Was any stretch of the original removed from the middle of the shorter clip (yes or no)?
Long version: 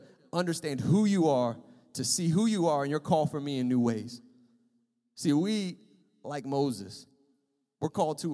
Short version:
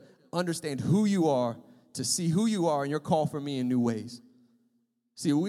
no